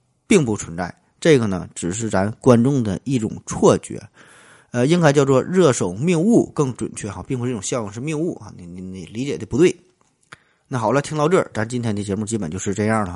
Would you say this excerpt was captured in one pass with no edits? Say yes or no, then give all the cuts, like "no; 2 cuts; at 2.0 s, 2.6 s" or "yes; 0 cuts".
yes; 0 cuts